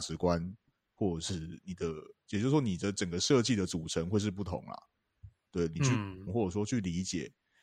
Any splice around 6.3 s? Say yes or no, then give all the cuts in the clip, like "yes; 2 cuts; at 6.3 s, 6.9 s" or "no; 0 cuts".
yes; 1 cut; at 6.3 s